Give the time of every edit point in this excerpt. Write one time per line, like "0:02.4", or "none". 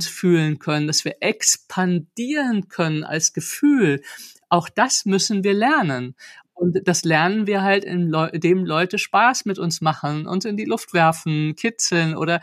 none